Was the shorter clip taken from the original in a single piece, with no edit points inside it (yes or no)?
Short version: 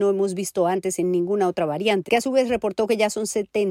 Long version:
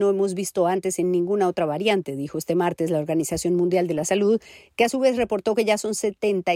no